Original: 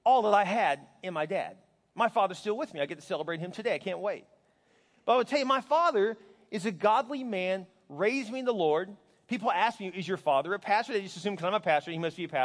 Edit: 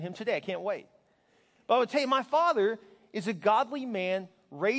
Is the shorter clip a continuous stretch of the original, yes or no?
yes